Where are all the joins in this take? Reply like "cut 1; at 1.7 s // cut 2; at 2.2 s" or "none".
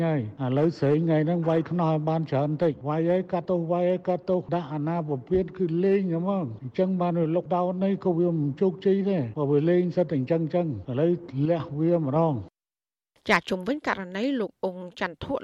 none